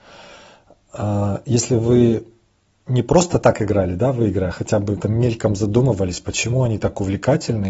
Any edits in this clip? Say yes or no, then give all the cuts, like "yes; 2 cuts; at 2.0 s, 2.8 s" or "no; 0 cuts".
yes; 1 cut; at 5.0 s